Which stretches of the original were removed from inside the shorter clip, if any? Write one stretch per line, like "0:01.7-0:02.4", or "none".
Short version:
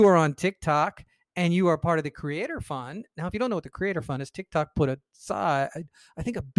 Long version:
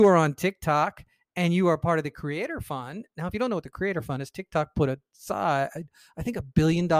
none